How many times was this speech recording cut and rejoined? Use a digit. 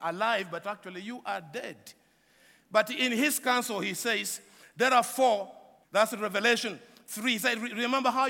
1